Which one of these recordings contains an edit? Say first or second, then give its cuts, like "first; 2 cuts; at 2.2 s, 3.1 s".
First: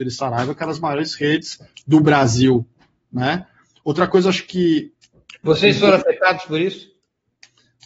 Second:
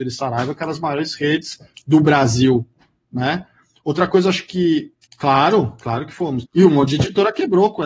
second; 2 cuts; at 5.1 s, 6.5 s